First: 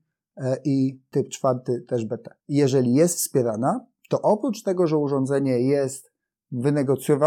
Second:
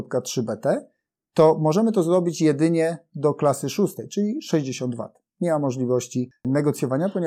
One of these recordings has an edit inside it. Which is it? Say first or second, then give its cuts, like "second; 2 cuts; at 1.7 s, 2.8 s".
first; 1 cut; at 2.4 s